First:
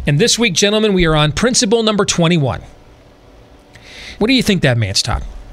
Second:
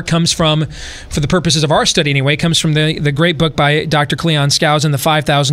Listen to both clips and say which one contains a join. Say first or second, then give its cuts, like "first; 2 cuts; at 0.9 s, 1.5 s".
first; 1 cut; at 4.2 s